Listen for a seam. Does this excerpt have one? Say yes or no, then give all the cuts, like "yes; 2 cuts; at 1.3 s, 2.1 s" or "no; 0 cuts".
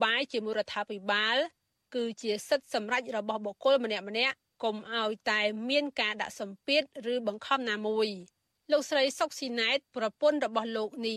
no; 0 cuts